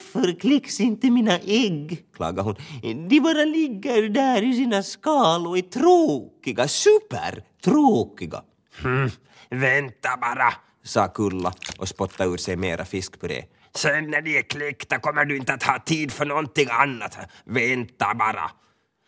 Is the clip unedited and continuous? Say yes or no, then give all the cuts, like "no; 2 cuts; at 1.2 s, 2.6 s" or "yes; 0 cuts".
yes; 0 cuts